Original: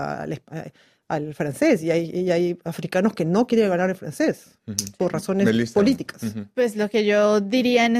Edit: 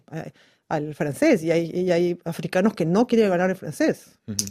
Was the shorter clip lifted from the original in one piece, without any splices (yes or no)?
yes